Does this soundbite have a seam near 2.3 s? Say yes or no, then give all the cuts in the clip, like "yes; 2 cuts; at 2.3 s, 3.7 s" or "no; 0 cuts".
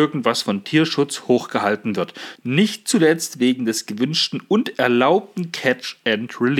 yes; 1 cut; at 2.3 s